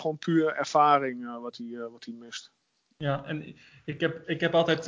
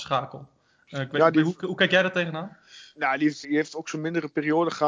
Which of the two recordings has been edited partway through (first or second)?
second